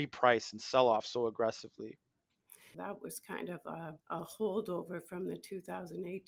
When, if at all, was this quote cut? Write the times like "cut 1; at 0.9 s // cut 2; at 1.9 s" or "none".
cut 1; at 2.7 s // cut 2; at 4.0 s